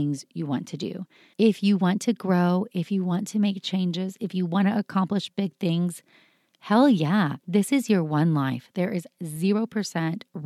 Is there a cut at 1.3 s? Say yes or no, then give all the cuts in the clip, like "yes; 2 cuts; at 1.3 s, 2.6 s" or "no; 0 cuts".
yes; 2 cuts; at 1.3 s, 7.4 s